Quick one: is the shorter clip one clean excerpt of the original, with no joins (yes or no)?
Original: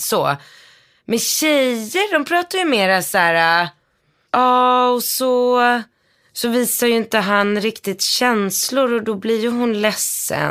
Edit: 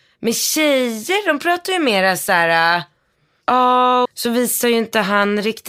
no